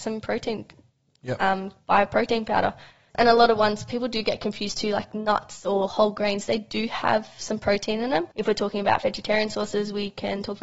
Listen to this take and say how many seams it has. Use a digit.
2